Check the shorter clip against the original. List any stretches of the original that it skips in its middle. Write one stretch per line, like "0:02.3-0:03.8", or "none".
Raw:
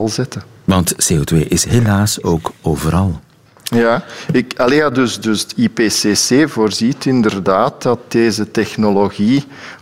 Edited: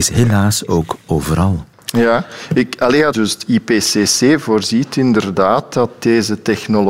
0:03.3-0:03.5
0:04.9-0:05.2